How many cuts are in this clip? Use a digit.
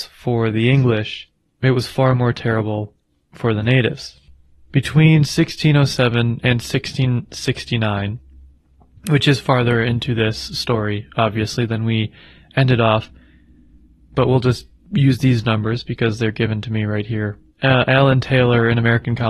0